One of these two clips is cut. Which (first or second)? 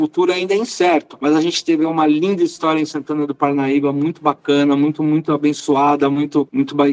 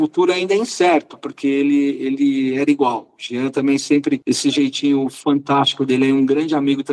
second